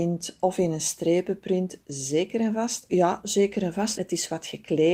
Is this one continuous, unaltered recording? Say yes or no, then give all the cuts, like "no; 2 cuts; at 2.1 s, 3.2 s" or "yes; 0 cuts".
no; 2 cuts; at 2.9 s, 4.0 s